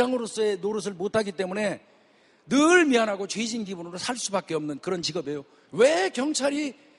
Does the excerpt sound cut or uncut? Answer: cut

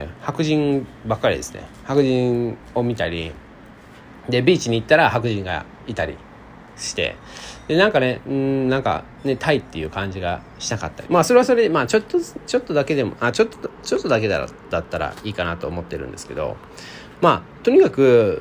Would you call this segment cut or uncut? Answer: cut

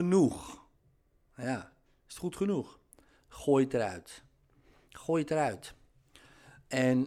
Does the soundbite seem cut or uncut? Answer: uncut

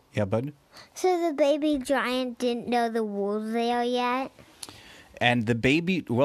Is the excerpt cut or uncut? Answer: uncut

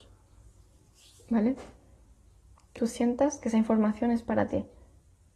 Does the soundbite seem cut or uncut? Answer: cut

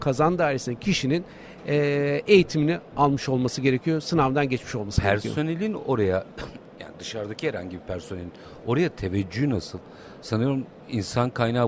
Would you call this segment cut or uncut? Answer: uncut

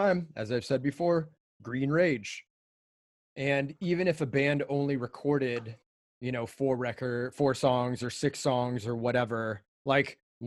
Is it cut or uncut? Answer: cut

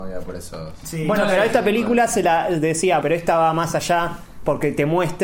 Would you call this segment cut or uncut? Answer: cut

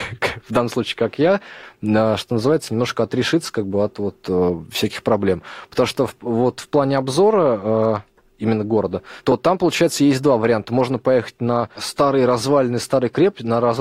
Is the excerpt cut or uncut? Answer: uncut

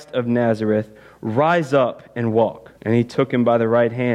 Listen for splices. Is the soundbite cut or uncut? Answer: cut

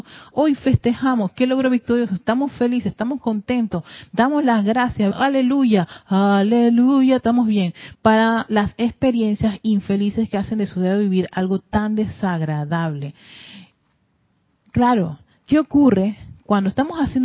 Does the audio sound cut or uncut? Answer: cut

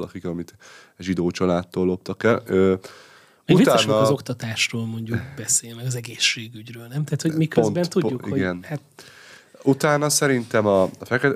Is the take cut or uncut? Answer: uncut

